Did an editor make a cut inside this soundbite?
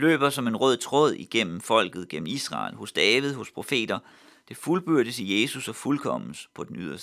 no; 0 cuts

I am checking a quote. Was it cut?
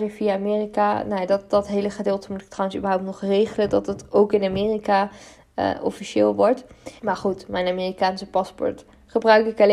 yes; 1 cut; at 7.0 s

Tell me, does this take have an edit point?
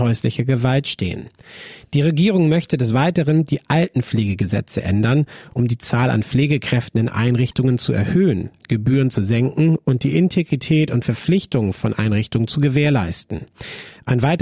no; 0 cuts

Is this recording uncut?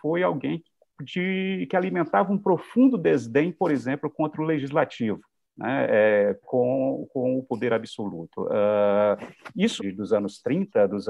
no; 2 cuts; at 6.4 s, 9.8 s

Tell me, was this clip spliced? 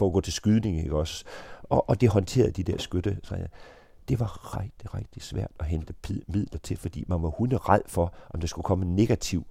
yes; 1 cut; at 4.5 s

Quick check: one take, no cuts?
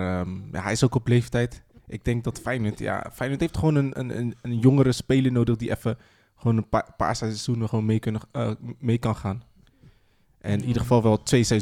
yes; 0 cuts

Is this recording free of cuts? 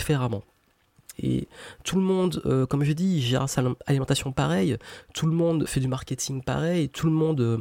no; 2 cuts; at 1.1 s, 5.7 s

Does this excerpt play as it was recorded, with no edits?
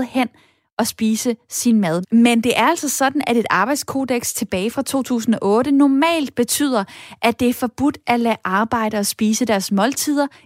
no; 1 cut; at 2.0 s

